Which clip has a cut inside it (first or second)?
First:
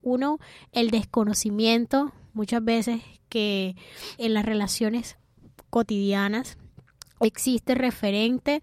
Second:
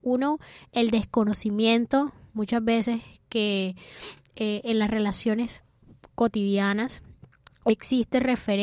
first